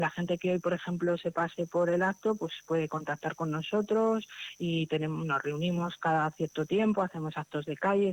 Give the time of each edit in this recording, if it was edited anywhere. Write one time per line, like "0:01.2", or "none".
none